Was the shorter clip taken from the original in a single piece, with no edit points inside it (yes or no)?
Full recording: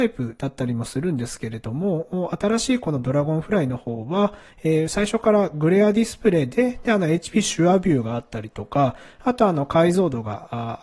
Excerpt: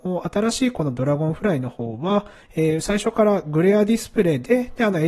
yes